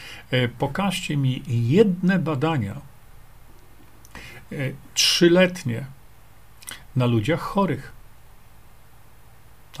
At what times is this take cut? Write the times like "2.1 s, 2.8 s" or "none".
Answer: none